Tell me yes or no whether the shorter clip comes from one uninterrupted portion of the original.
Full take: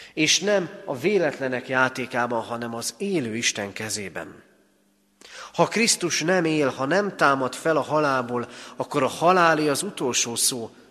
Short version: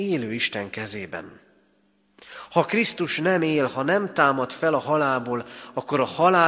yes